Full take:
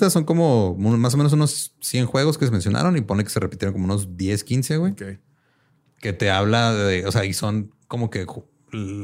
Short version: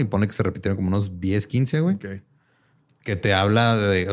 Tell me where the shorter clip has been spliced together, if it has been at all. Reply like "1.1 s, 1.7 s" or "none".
none